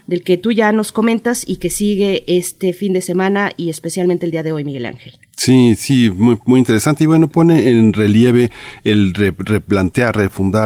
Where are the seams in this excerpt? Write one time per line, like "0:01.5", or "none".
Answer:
none